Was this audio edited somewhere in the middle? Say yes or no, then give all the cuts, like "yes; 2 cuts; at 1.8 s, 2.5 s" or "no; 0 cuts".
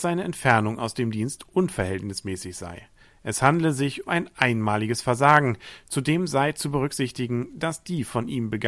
yes; 1 cut; at 4.1 s